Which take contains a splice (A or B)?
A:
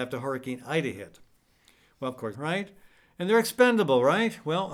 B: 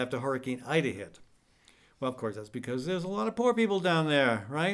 A